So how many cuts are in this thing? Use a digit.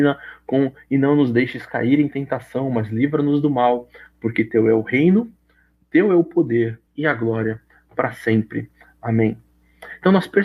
1